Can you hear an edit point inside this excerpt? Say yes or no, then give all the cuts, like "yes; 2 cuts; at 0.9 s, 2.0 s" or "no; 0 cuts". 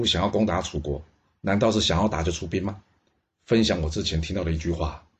yes; 1 cut; at 3.2 s